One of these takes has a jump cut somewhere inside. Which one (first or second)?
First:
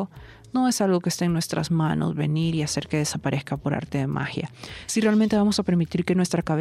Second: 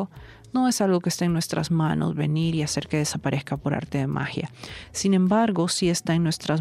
first